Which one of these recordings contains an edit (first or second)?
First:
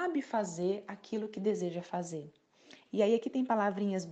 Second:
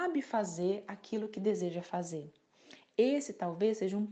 first